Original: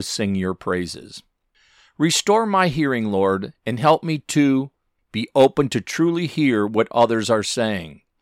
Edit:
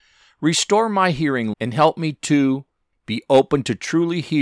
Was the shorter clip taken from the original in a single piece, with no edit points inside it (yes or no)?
no